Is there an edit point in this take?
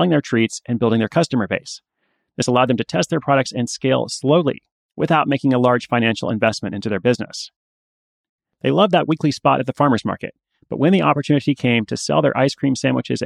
no; 0 cuts

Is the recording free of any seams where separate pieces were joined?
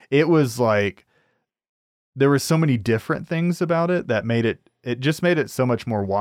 yes; 0 cuts

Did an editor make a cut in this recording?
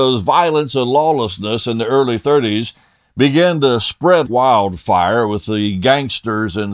yes; 1 cut; at 4.3 s

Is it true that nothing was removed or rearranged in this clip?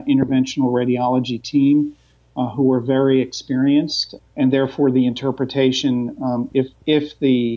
no; 1 cut; at 4.2 s

